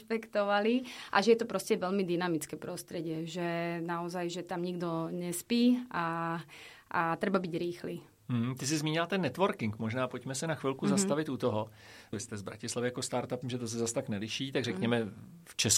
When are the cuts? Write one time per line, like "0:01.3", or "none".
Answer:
0:12.1
0:13.4